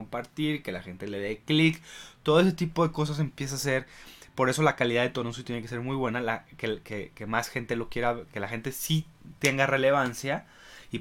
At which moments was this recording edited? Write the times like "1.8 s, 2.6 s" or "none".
6.8 s, 8.3 s